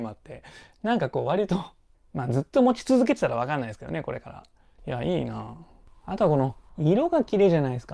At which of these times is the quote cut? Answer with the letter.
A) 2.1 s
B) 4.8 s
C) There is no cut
B